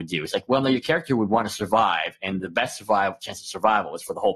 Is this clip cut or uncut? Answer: uncut